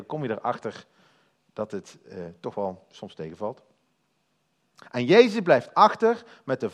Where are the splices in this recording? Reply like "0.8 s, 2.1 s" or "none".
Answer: 4.8 s